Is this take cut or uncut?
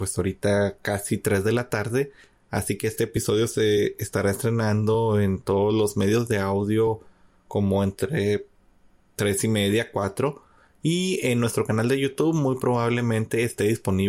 uncut